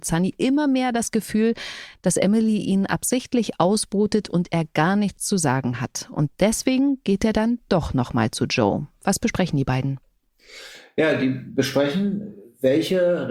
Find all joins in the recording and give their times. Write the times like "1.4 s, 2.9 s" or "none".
none

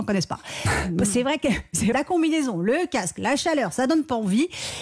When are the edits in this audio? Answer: 1.9 s

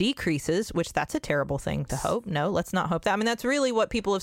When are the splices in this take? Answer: 1.9 s

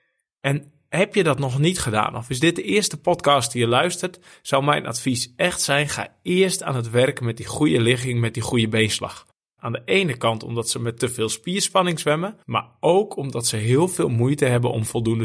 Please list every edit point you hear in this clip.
9.6 s, 12.4 s

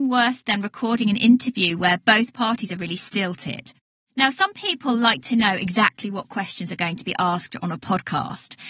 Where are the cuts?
none

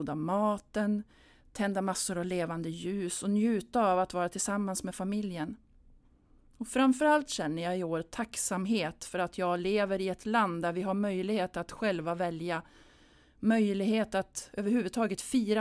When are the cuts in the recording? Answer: none

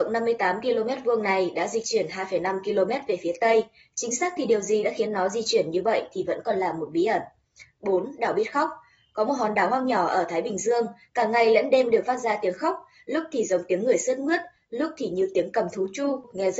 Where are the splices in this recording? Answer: none

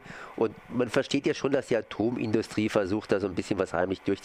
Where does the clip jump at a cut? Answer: none

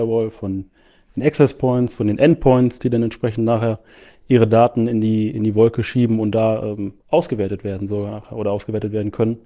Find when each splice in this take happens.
7.0 s

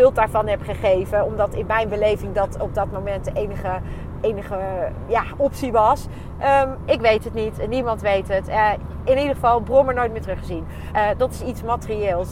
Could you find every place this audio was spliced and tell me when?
6.9 s, 10.9 s

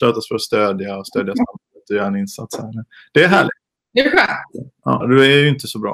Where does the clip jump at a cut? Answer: 5.0 s

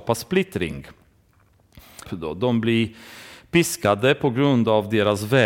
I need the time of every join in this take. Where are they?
2.0 s

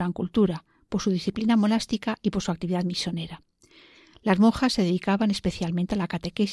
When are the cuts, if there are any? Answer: none

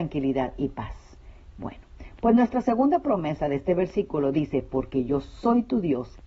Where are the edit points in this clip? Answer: 1.5 s

